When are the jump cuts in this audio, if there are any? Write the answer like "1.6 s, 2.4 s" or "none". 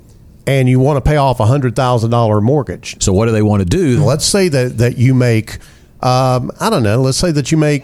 2.9 s, 4.0 s